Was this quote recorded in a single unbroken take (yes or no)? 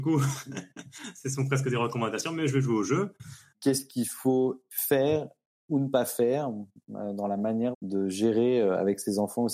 no